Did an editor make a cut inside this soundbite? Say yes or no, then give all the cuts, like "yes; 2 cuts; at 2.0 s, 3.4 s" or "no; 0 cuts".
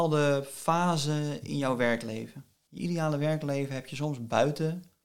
yes; 1 cut; at 2.7 s